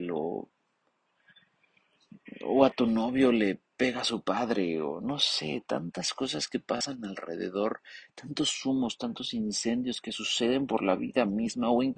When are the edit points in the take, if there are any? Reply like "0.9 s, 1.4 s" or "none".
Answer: none

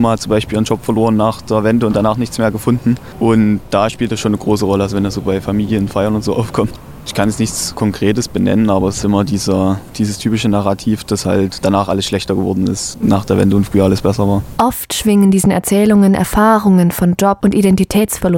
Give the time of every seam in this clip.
9.0 s, 14.6 s

